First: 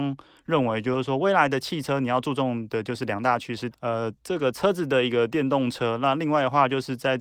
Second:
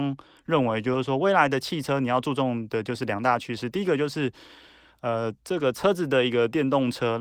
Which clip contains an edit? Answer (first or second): first